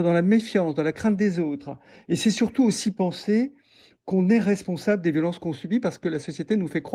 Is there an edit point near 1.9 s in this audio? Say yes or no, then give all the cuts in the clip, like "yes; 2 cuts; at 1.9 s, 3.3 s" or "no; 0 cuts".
no; 0 cuts